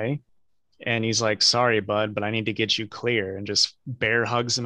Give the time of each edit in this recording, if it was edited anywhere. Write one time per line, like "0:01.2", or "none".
none